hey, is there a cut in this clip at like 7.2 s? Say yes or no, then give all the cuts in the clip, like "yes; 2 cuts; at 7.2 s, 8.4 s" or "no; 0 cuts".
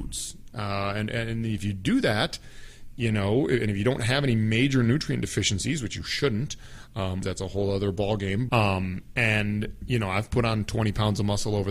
yes; 2 cuts; at 7.2 s, 8.5 s